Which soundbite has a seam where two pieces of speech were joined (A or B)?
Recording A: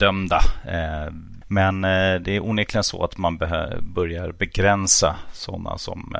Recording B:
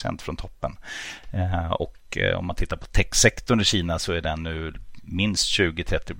A